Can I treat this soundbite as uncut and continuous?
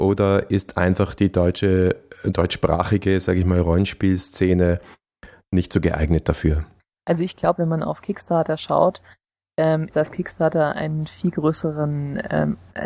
no; 2 cuts; at 7.6 s, 9.9 s

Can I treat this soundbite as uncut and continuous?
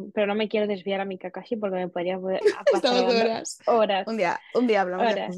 yes; 0 cuts

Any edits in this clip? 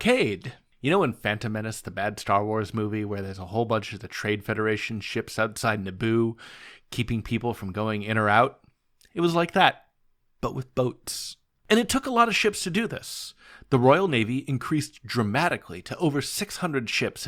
no; 0 cuts

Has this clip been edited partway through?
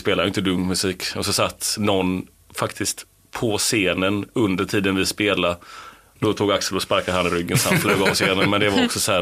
yes; 1 cut; at 6.2 s

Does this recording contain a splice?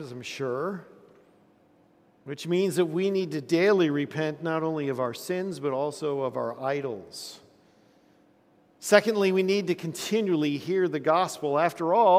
no; 0 cuts

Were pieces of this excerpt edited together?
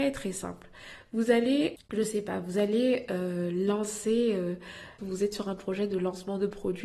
yes; 2 cuts; at 1.8 s, 5.0 s

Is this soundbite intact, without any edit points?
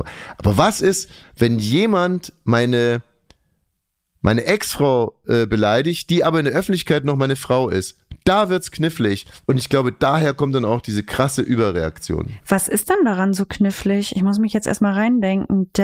yes; 0 cuts

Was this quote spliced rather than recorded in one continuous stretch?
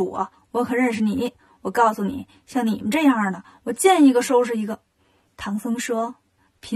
yes; 2 cuts; at 2.4 s, 5.0 s

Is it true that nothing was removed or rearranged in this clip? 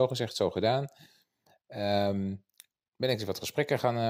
yes; 0 cuts

